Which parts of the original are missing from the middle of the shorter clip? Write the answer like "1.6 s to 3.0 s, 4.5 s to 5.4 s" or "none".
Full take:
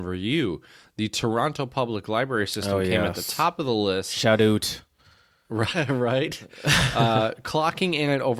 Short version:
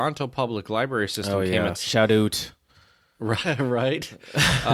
3.1 s to 4.0 s